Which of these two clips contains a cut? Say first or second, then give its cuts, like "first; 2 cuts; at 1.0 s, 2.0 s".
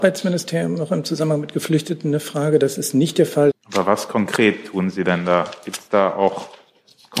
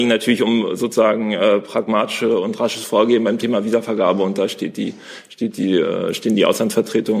first; 1 cut; at 3.5 s